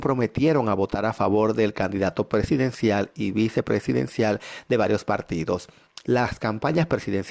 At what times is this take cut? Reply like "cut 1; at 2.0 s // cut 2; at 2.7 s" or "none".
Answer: cut 1; at 6.0 s